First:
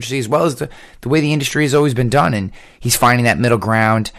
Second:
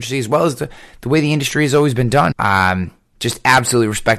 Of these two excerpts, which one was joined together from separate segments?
second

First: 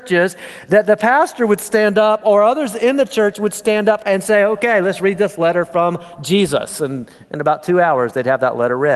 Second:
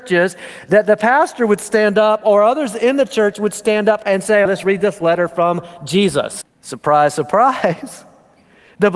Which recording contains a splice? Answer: second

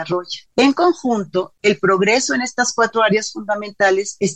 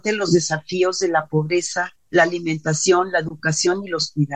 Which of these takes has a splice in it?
second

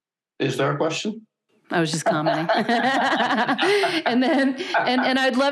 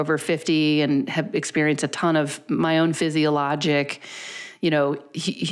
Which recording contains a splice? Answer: first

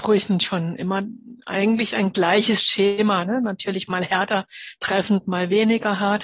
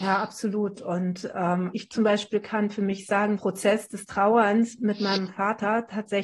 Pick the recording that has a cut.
second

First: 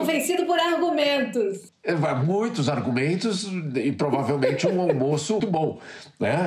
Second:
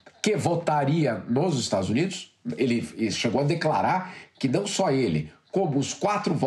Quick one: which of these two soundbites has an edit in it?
first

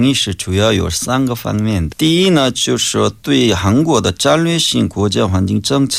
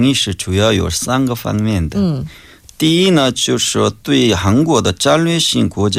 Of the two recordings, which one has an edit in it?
first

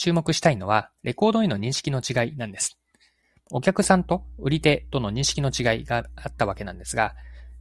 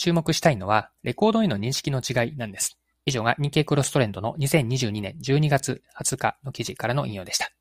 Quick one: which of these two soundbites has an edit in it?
second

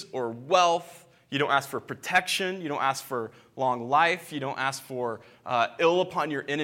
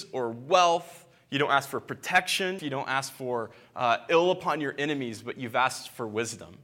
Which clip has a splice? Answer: second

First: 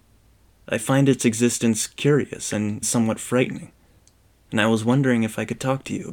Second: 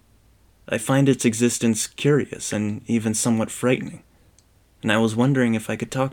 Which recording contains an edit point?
first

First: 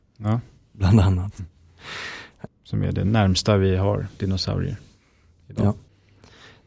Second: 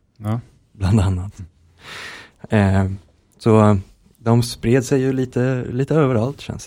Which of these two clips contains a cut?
first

